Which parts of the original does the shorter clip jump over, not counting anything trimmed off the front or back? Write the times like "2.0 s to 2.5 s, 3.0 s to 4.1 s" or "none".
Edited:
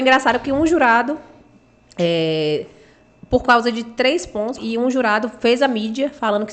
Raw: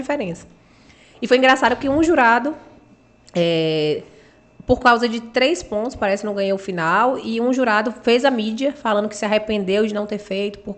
5.9 s to 7.2 s